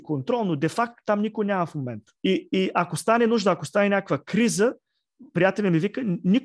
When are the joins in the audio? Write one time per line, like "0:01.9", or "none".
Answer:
0:02.2